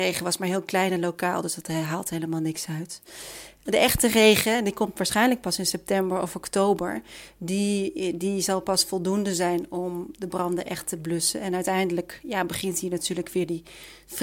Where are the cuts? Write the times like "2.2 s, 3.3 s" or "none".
none